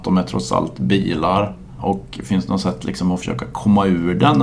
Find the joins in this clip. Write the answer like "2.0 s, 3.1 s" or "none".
1.8 s